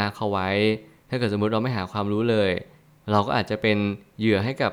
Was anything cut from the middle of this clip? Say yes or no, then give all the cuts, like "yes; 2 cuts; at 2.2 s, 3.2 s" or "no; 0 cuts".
no; 0 cuts